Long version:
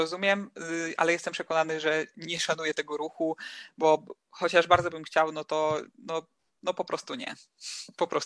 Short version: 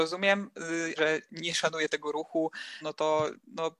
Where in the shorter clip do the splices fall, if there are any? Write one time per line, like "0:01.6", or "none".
0:01.0
0:02.8

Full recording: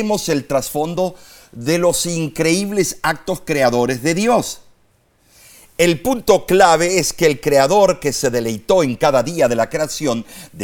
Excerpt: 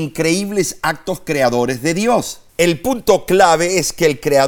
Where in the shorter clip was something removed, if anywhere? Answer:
0:02.5

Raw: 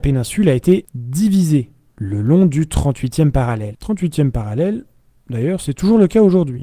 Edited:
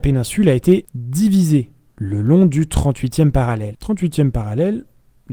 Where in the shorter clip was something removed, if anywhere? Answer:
none

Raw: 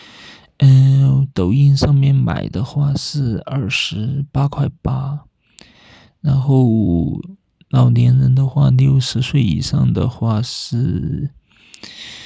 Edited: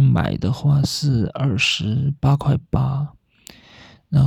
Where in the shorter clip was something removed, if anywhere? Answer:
none

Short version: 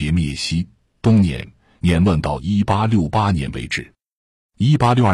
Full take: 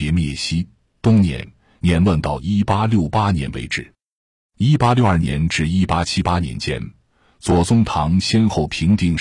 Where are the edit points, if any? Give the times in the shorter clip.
none

